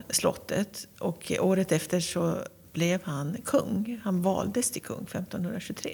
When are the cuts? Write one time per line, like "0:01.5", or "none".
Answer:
none